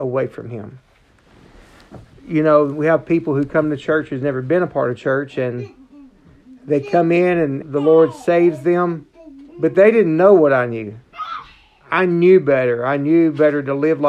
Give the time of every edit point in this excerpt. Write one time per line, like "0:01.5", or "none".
0:07.6
0:09.5